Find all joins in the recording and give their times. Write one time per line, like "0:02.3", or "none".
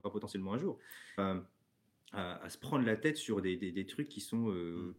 0:01.2